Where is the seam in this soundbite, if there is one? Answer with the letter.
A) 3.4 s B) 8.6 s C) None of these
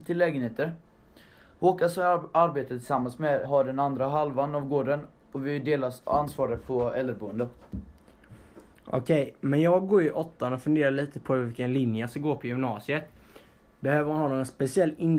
A